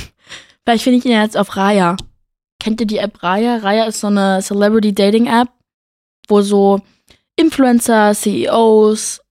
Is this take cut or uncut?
uncut